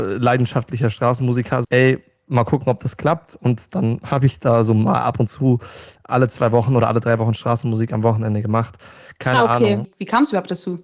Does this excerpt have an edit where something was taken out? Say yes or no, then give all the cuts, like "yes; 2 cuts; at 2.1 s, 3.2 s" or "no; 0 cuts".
yes; 2 cuts; at 1.6 s, 9.8 s